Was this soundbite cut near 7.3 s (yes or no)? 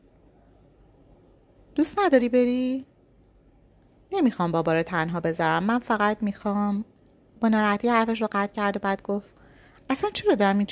no